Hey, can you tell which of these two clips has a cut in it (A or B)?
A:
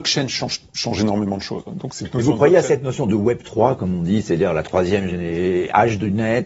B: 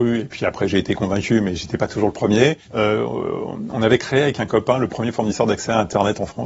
B